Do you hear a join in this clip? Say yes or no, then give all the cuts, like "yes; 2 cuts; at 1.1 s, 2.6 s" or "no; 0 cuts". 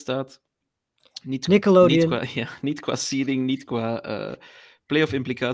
no; 0 cuts